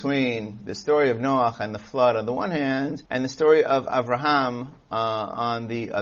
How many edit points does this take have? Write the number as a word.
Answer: one